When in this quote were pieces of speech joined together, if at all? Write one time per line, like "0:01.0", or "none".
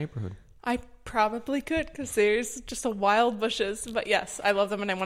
none